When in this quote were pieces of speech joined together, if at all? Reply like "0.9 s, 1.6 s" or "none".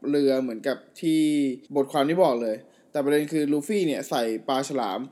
1.7 s